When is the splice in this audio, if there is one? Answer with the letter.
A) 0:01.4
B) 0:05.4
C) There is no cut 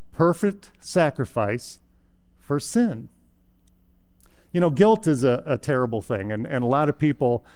C